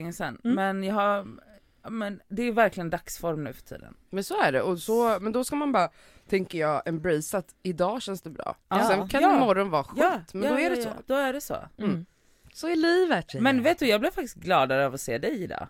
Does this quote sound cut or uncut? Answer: uncut